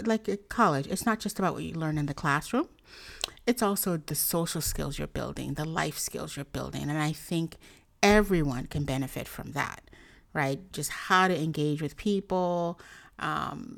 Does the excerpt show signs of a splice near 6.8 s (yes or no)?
no